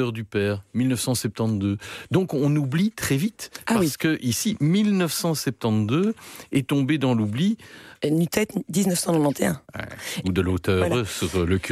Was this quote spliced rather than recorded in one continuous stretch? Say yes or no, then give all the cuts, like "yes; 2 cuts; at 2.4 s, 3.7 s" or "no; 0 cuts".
yes; 2 cuts; at 7.9 s, 10.2 s